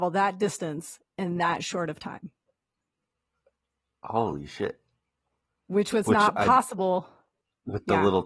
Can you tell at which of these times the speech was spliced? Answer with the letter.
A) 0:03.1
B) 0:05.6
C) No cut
C